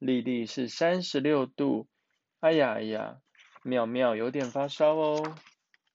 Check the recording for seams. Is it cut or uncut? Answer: uncut